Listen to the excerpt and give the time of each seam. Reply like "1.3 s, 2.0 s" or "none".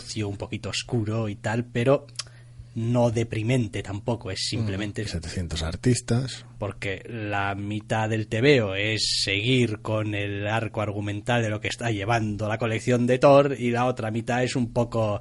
5.1 s